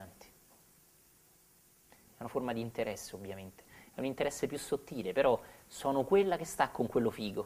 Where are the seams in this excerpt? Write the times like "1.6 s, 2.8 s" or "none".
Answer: none